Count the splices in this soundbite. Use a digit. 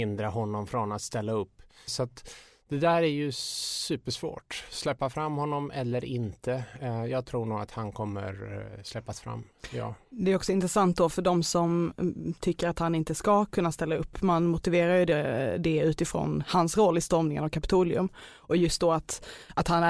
1